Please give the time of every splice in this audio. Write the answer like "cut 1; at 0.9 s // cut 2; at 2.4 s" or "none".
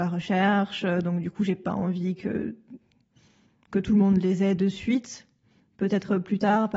none